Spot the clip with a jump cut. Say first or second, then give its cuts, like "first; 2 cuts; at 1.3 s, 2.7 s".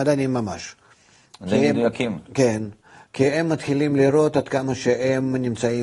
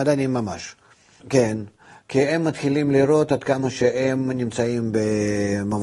second; 1 cut; at 1.2 s